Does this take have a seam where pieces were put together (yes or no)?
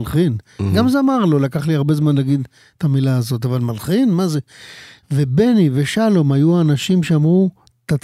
no